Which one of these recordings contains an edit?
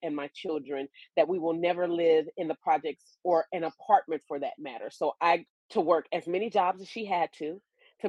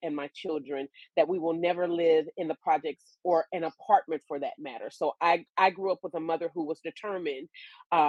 first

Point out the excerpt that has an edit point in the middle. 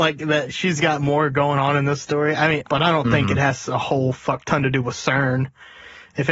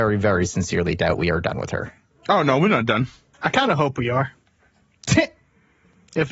first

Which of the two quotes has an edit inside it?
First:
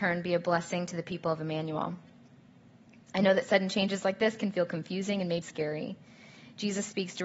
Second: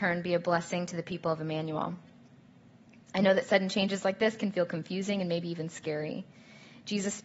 first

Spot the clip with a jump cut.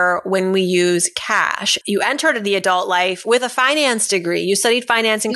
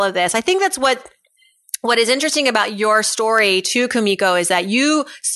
first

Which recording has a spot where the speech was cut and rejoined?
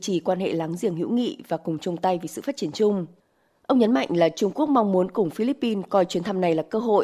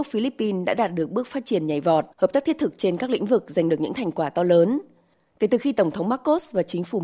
second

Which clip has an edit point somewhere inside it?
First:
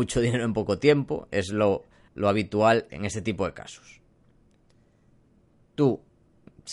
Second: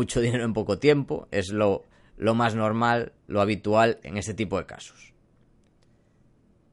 first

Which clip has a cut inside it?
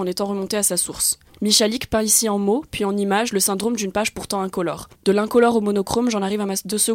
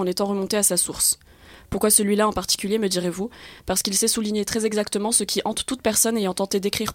first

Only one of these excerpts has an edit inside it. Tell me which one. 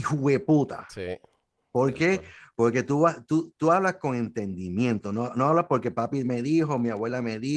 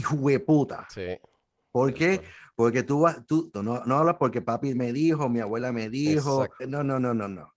second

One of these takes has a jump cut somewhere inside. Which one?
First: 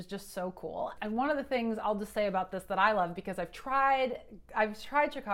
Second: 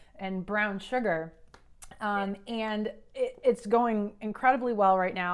first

